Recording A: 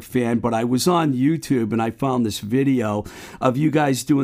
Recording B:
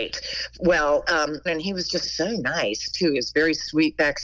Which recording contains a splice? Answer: B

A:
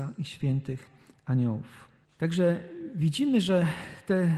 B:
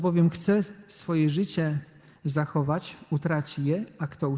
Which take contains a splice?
A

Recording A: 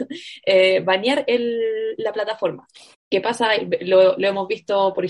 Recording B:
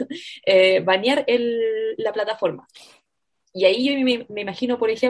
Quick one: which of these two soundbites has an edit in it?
A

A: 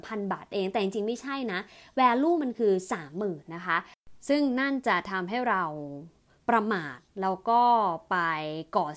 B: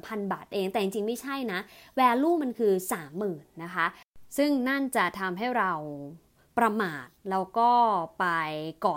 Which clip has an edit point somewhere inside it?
A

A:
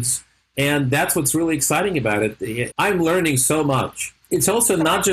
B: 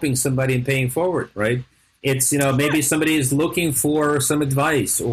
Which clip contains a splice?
A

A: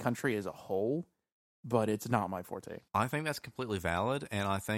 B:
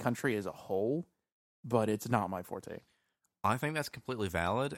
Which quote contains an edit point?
A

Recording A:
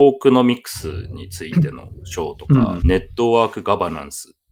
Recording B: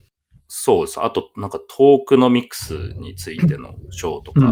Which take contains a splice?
A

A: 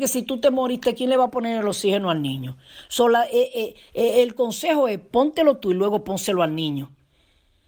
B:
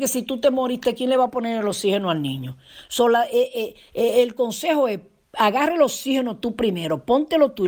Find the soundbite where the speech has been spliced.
A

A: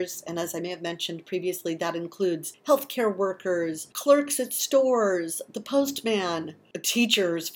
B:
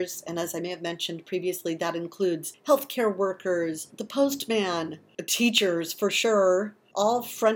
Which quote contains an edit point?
B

